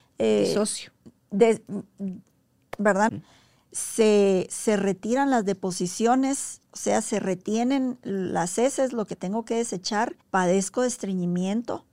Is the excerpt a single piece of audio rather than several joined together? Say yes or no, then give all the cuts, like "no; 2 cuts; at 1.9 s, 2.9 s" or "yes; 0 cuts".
no; 2 cuts; at 3.1 s, 10.2 s